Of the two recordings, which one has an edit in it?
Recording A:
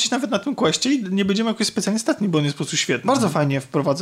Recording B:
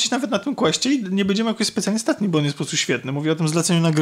A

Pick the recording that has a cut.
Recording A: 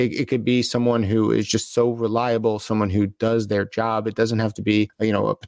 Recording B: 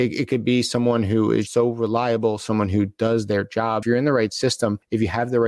B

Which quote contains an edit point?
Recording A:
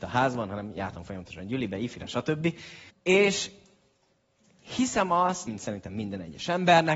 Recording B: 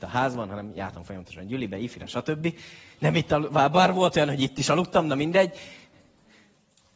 A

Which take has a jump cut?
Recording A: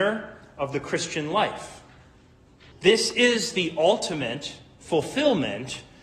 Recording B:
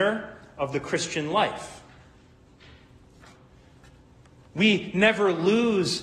A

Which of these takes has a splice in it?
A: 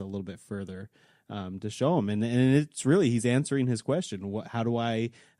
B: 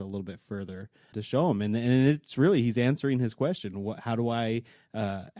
B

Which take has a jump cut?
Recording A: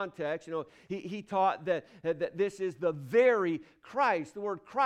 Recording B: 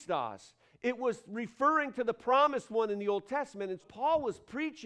B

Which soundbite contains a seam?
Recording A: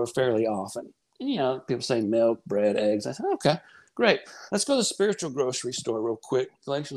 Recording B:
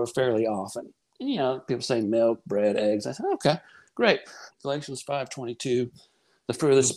B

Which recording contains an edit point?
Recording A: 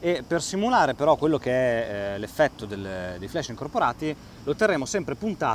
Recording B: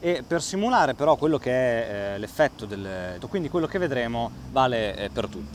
B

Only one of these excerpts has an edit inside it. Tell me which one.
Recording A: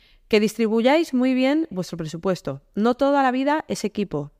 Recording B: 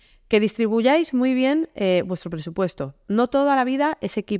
A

